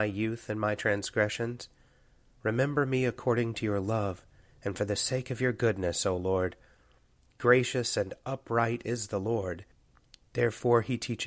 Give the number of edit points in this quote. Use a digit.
0